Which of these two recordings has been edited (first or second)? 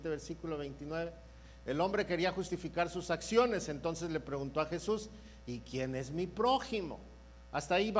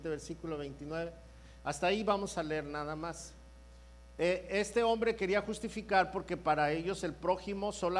second